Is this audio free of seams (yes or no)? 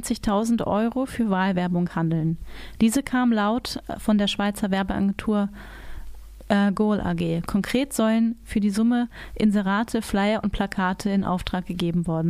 yes